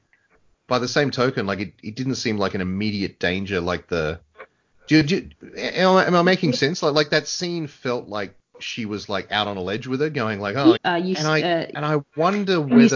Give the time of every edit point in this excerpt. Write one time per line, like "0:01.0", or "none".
0:10.8